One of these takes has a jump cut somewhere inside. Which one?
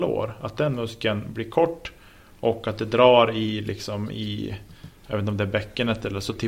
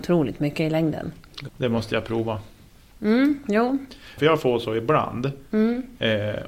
second; 2 cuts; at 1.5 s, 4.2 s

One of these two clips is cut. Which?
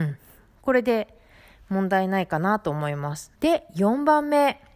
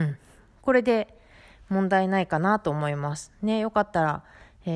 first; 1 cut; at 3.4 s

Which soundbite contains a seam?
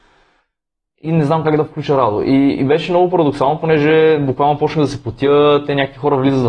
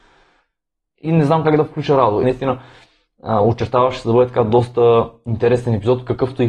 second; 1 cut; at 2.2 s

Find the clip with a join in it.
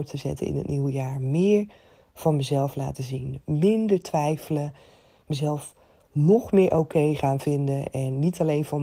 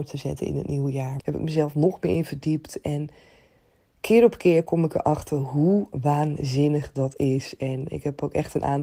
second; 1 cut; at 1.2 s

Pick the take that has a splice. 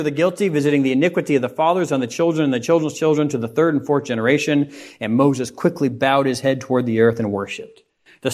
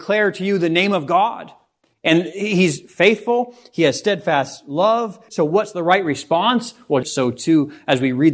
second; 2 cuts; at 5.3 s, 7.0 s

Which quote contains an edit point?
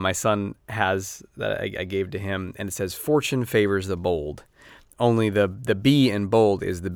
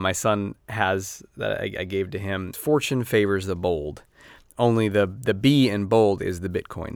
second; 1 cut; at 2.5 s

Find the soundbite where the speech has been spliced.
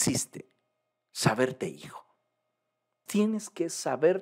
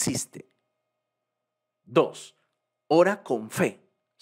first; 2 cuts; at 0.9 s, 3.1 s

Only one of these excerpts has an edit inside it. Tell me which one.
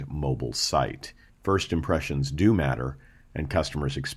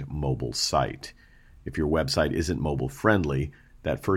first; 1 cut; at 1.3 s

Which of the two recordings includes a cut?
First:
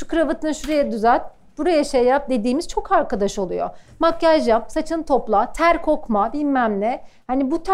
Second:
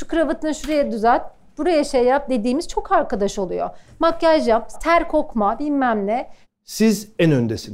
second; 2 cuts; at 4.7 s, 6.4 s

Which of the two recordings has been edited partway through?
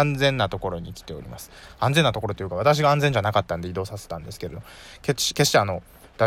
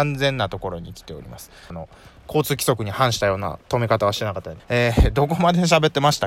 second; 2 cuts; at 1.7 s, 4.6 s

